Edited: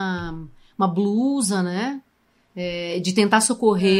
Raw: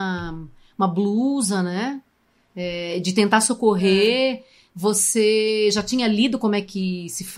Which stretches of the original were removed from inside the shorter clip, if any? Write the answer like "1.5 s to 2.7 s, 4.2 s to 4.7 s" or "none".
none